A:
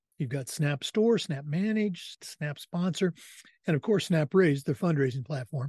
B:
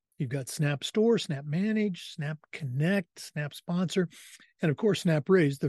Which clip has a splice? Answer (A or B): A